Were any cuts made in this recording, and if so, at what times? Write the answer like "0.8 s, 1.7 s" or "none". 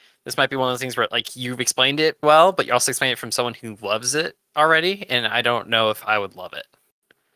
2.2 s

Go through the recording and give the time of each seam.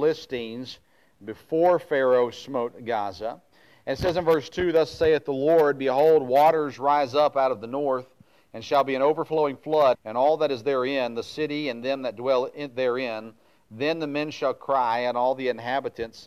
9.9 s

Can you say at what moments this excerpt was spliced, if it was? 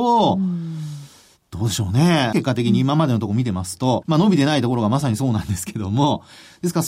2.3 s, 4.0 s

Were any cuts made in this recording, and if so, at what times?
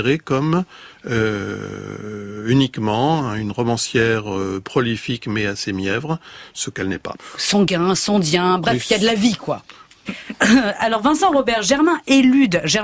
10.1 s

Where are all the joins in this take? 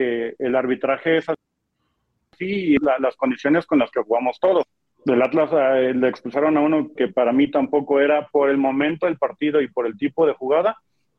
7.0 s

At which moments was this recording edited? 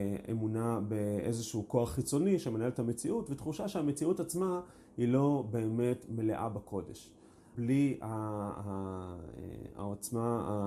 7.5 s

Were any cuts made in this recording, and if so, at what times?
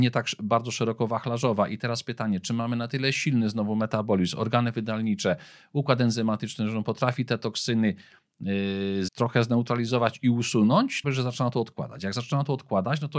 9.1 s, 11.0 s

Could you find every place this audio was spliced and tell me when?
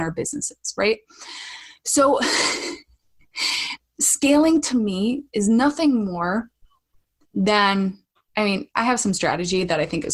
none

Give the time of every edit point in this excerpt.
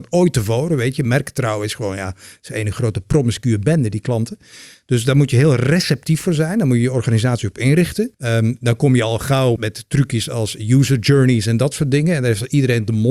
8.1 s, 9.6 s

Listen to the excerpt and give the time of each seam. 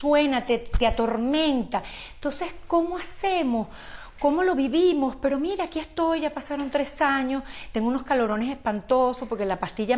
none

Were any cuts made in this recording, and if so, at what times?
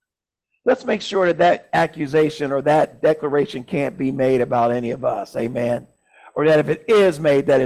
none

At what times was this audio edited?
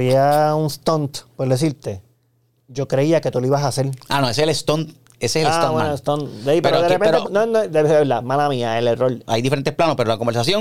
2.6 s, 7.2 s, 9.2 s

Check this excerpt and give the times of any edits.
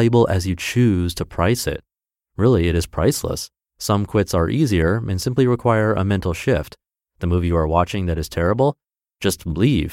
3.6 s

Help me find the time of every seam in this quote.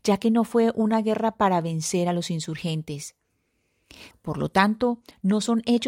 4.1 s

